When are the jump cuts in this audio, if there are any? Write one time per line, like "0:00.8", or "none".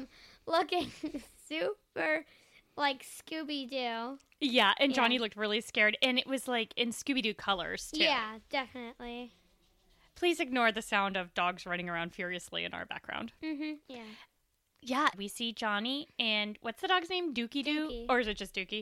0:13.8
0:15.1